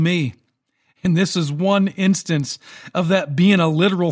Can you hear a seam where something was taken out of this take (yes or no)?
no